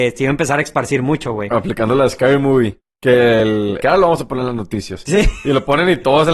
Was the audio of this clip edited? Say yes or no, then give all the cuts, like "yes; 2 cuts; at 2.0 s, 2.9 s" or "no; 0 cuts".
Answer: yes; 1 cut; at 3.8 s